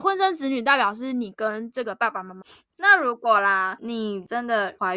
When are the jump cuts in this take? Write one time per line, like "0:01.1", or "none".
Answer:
0:02.4